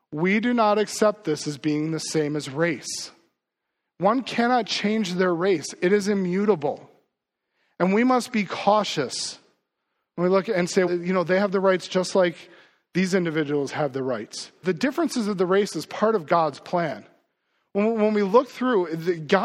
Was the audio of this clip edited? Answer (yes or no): yes